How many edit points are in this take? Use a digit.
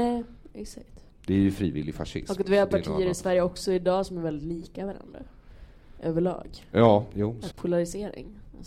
1